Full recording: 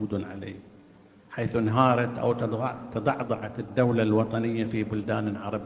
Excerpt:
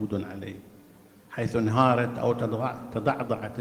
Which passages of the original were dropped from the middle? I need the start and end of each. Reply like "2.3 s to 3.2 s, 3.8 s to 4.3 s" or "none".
none